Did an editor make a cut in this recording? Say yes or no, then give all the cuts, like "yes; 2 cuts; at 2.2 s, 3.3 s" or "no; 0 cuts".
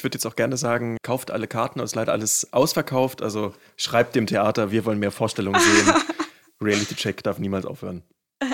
yes; 1 cut; at 1.0 s